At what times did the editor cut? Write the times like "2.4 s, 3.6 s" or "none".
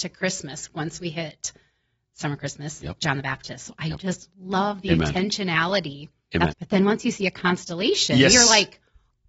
6.5 s